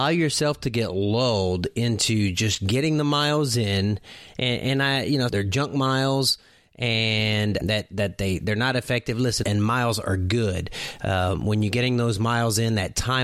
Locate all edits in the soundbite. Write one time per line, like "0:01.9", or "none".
0:05.3
0:07.6
0:09.4